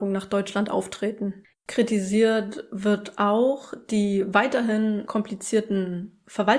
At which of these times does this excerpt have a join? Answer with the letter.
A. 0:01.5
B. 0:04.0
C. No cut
A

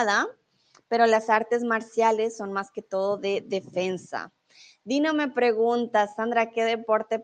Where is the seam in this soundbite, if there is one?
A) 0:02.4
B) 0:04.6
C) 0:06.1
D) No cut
D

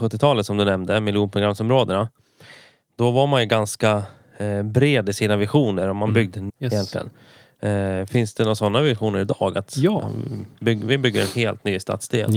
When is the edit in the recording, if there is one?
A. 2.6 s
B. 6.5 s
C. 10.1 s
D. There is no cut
B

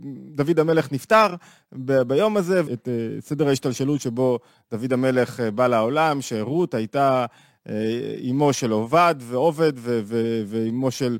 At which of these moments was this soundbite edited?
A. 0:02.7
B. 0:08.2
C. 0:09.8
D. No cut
A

